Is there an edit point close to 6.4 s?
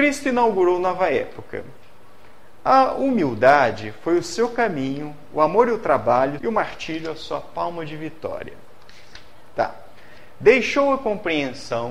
yes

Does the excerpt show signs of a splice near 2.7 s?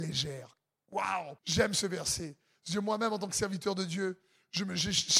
no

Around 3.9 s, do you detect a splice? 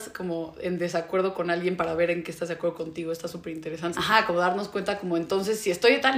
yes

